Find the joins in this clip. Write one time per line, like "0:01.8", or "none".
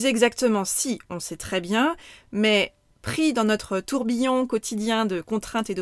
none